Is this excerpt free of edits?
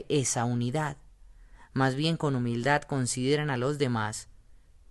yes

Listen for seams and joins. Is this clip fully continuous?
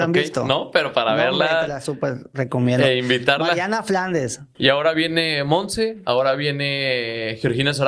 no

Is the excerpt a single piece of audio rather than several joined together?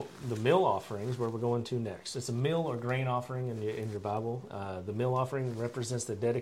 yes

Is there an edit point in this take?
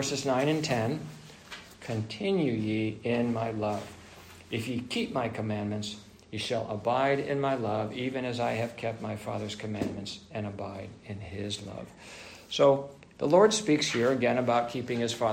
yes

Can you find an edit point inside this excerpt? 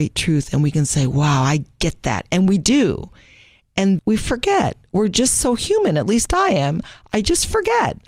yes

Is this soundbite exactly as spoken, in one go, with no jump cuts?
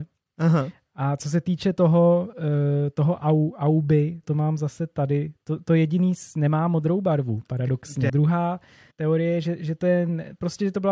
no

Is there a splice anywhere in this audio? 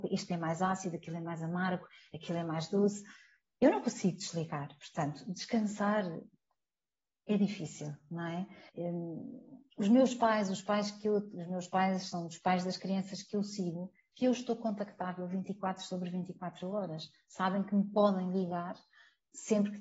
yes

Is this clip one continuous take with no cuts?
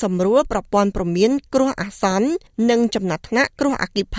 yes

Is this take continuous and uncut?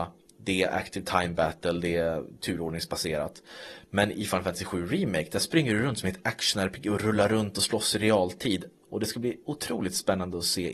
no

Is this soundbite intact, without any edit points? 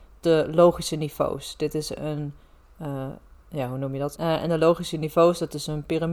no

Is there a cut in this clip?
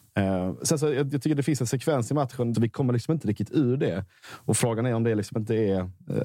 yes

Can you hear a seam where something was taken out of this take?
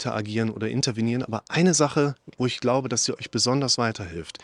no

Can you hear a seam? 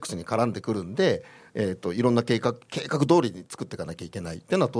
no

